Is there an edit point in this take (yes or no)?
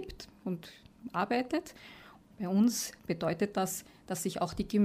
yes